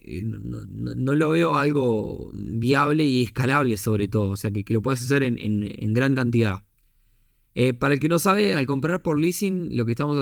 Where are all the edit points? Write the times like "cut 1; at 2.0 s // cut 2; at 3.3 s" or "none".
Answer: none